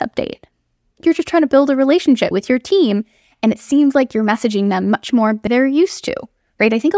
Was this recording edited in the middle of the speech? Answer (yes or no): yes